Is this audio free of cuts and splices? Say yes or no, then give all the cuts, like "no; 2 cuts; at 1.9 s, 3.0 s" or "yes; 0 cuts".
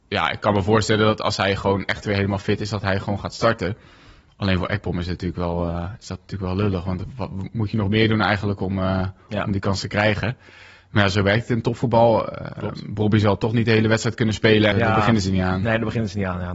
no; 1 cut; at 14.7 s